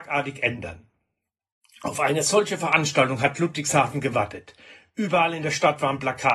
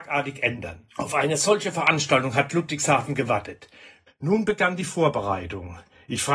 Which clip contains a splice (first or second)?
second